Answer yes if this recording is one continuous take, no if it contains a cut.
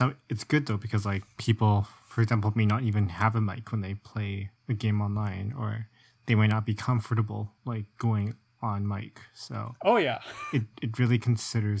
no